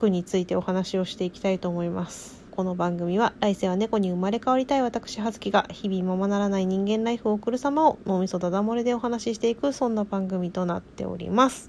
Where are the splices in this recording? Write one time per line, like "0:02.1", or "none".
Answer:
0:02.5